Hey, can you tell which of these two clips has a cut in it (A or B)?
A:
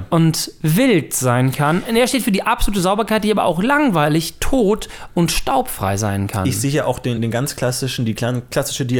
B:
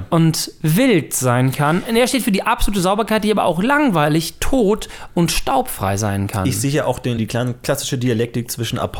B